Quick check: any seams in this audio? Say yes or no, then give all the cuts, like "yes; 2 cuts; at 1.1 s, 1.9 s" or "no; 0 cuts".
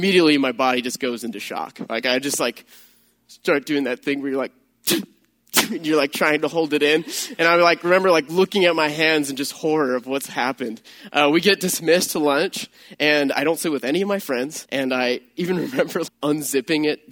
yes; 2 cuts; at 14.7 s, 16.1 s